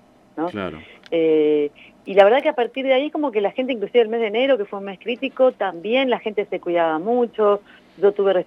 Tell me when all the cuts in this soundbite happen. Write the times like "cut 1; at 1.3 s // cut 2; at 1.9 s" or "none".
none